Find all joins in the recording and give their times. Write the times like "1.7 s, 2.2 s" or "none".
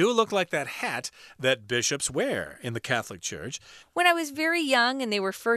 3.8 s

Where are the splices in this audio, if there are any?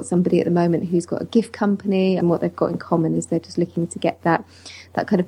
2.2 s

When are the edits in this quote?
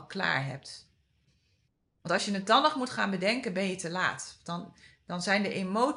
none

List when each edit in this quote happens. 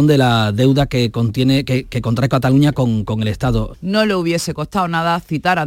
3.7 s

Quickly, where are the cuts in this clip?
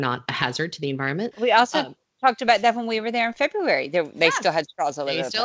1.3 s

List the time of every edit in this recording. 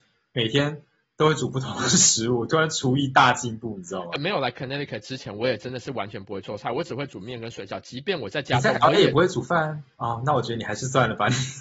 9.9 s

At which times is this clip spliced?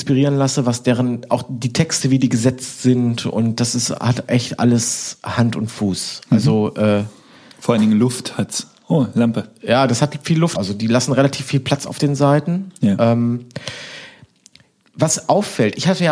10.5 s

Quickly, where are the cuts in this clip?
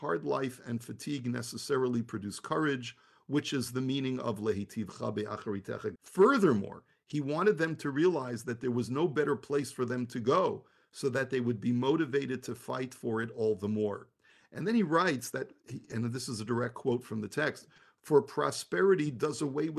6.0 s

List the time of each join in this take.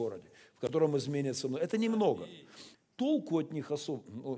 2.7 s

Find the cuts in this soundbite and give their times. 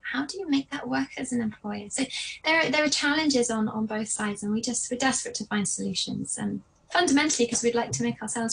none

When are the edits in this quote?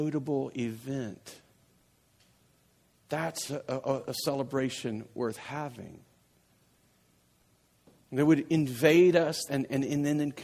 9.5 s

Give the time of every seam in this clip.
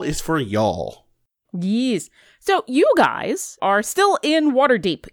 1.4 s, 3.6 s

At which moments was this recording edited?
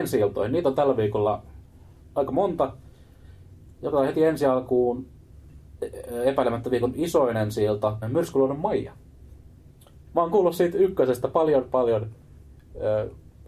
8.0 s, 10.1 s

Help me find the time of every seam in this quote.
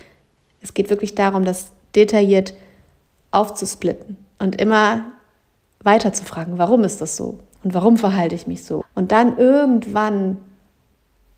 8.8 s

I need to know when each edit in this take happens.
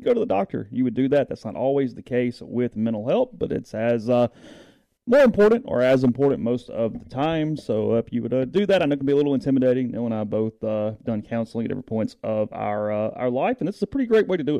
none

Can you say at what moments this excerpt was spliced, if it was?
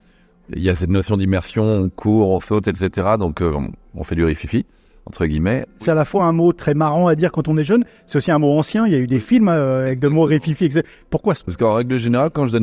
5.7 s, 11.5 s

